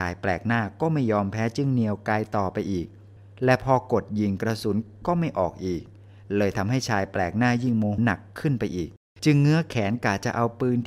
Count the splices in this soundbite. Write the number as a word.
one